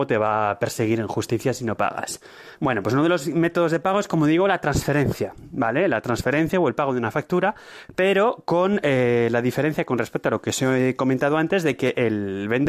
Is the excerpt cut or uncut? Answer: cut